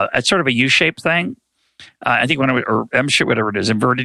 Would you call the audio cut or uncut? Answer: uncut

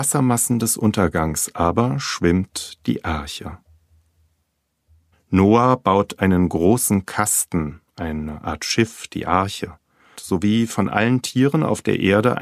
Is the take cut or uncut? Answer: cut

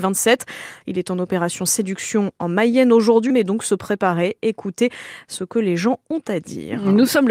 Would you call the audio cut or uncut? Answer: cut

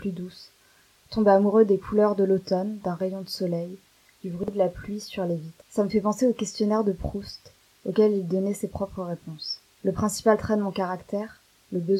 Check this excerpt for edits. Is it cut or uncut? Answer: uncut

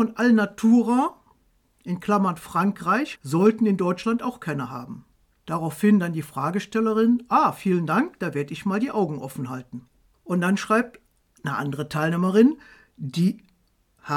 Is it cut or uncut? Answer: cut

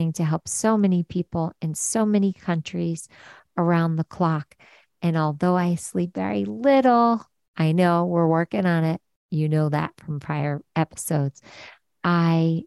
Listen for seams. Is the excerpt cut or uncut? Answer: uncut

